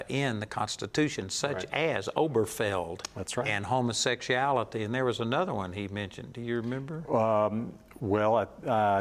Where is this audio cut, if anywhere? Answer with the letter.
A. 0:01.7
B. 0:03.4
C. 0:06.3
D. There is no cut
D